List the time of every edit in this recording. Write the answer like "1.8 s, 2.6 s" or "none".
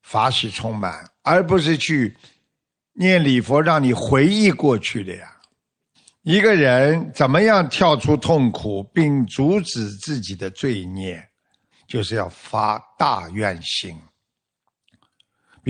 none